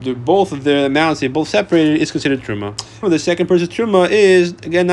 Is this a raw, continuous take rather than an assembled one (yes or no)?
no